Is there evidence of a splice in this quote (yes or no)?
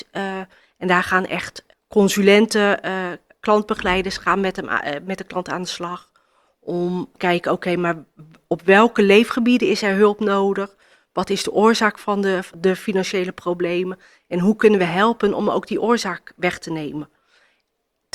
no